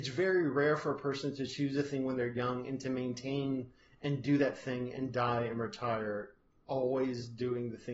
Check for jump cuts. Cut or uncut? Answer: uncut